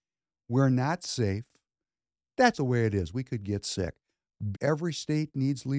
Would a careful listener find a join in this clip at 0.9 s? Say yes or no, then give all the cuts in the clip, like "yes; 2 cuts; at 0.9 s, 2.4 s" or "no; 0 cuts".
no; 2 cuts; at 2.5 s, 4.5 s